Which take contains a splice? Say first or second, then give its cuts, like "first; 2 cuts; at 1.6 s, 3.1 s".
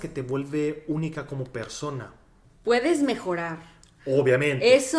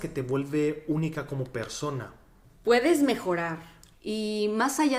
second; 1 cut; at 3.9 s